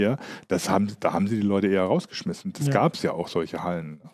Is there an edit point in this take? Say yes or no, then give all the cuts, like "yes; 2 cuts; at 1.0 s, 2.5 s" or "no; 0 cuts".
no; 0 cuts